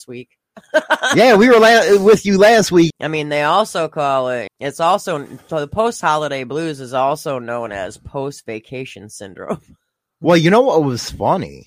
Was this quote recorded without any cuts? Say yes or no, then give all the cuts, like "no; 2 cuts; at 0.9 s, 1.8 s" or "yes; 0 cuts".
no; 2 cuts; at 2.9 s, 4.5 s